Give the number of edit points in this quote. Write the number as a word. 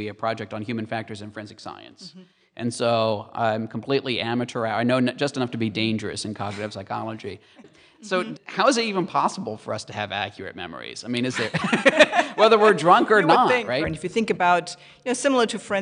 two